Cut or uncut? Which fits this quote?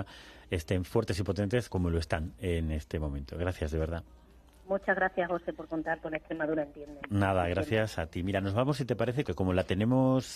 cut